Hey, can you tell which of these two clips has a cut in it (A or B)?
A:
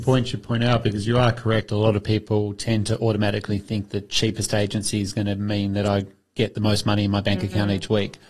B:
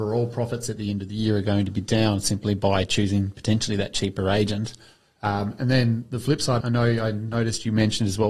B